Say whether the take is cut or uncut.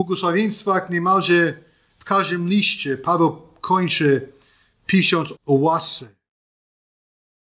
cut